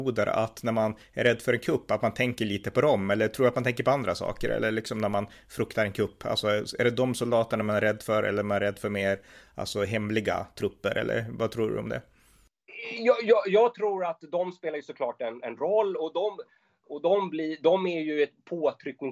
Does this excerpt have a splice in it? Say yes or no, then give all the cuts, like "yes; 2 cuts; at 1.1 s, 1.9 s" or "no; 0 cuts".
no; 0 cuts